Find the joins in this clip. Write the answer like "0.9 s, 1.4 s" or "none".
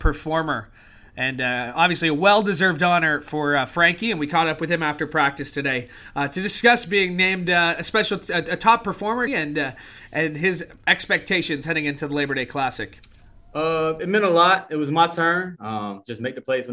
9.3 s, 15.5 s